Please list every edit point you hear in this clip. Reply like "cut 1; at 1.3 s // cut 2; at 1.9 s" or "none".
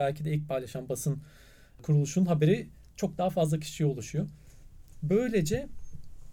none